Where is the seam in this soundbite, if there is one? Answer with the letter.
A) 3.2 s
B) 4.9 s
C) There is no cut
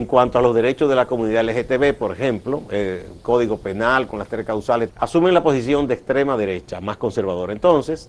B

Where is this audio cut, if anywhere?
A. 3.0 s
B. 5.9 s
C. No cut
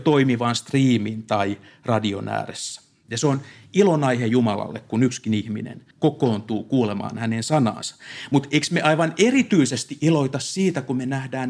B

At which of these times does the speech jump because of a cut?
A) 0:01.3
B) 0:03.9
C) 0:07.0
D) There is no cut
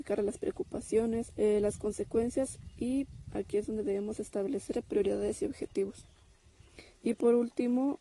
A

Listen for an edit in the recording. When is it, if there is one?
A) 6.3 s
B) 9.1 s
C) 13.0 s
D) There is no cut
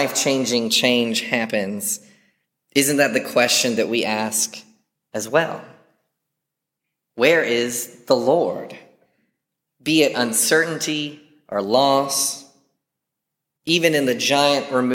D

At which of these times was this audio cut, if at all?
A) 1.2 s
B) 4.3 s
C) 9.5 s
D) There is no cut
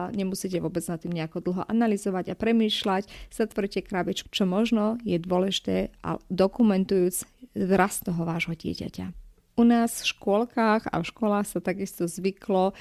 B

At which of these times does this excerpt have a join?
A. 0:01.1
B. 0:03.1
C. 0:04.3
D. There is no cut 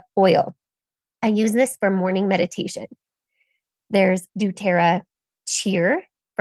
C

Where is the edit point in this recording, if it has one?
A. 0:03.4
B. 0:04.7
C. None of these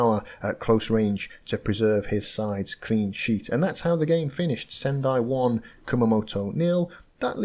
C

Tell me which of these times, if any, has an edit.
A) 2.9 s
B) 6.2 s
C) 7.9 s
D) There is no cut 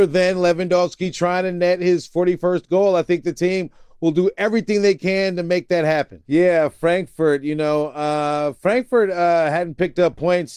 B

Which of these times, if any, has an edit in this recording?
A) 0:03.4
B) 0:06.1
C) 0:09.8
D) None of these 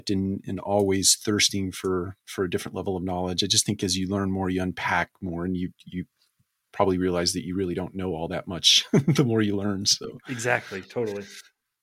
D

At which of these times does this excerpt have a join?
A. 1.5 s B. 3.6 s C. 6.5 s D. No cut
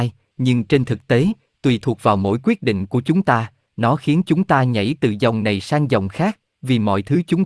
D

